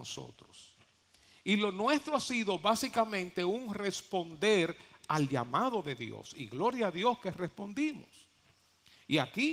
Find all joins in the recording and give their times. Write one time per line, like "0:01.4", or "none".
none